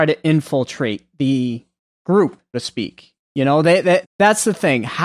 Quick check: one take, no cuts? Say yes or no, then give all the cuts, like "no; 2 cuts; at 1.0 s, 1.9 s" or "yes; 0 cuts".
no; 2 cuts; at 2.5 s, 4.0 s